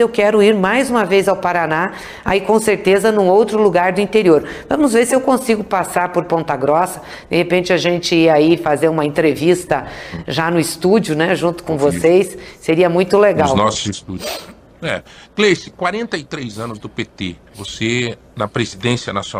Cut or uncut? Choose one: uncut